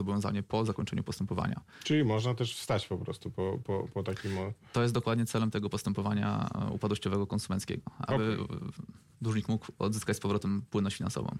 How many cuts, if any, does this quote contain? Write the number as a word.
zero